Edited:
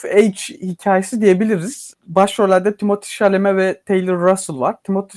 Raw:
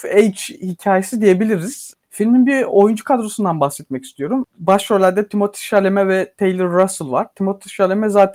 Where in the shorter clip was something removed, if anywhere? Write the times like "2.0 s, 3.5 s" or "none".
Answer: 2.0 s